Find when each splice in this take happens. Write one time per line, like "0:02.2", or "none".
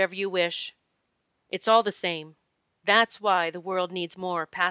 0:02.7